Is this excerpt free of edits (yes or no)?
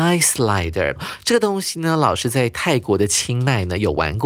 yes